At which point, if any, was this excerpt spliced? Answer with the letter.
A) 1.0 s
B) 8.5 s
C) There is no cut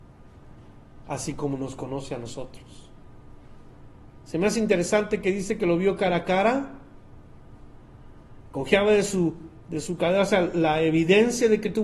A